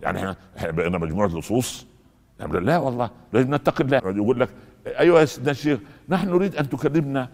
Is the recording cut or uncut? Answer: cut